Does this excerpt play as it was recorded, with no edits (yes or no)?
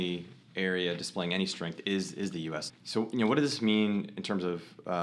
no